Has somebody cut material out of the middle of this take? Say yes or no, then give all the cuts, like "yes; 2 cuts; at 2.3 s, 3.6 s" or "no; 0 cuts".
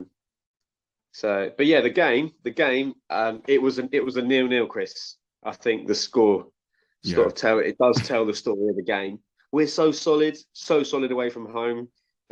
no; 0 cuts